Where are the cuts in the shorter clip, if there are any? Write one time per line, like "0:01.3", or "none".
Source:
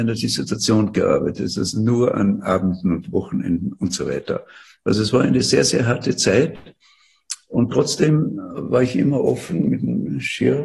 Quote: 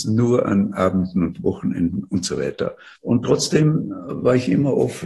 0:03.0